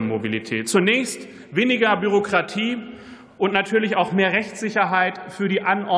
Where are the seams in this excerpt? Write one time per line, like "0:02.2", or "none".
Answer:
none